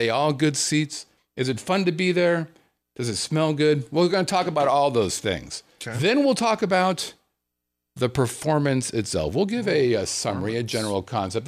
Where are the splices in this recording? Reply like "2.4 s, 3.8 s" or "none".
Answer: none